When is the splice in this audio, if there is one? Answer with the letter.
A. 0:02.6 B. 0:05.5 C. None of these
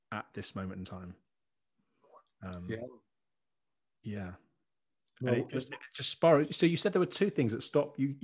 C